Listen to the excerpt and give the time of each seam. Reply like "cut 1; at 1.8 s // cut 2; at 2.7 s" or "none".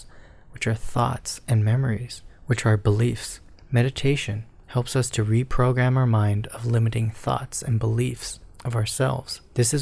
none